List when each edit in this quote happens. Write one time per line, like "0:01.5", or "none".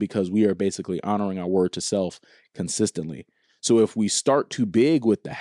none